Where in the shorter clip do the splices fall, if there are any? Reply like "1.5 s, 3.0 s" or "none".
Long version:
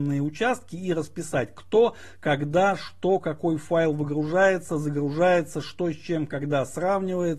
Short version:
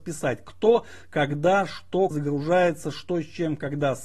2.1 s